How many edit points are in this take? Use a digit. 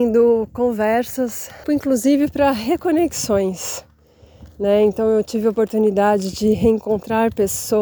1